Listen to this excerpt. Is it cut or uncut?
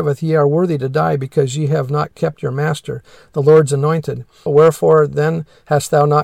cut